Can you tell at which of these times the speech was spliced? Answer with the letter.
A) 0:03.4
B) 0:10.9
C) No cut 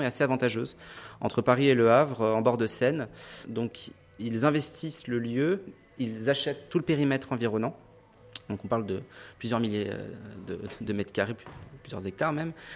C